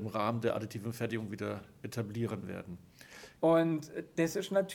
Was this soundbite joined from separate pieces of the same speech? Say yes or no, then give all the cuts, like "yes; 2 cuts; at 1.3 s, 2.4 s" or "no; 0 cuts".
yes; 1 cut; at 3.4 s